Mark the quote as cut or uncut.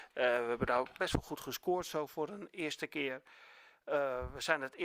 uncut